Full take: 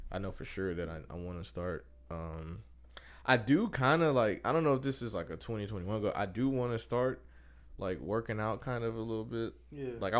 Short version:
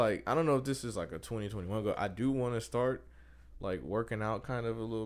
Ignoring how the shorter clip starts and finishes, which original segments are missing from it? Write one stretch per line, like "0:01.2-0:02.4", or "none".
none